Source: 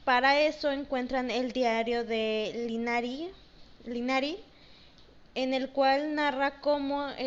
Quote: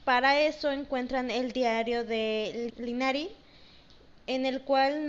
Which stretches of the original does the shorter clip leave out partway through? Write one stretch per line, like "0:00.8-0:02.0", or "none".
0:02.7-0:03.8